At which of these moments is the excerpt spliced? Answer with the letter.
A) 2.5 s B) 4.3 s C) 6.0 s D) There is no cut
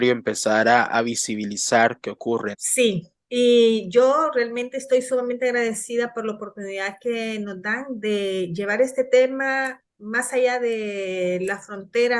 A